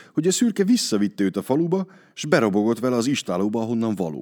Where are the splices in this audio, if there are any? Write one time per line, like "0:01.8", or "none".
none